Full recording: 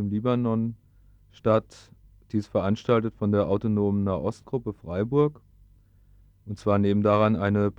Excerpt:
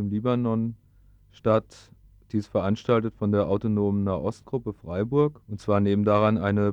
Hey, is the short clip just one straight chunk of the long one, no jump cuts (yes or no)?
no